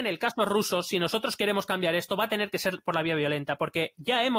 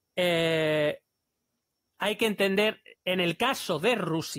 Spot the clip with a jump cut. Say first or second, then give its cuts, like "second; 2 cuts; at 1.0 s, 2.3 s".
second; 1 cut; at 3.0 s